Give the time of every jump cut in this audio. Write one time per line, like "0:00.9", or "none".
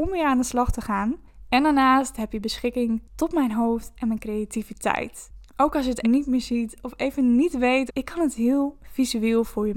0:06.0
0:07.9